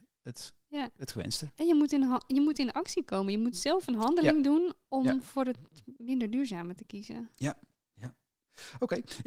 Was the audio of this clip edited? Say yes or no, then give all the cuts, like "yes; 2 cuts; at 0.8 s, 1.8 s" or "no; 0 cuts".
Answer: no; 0 cuts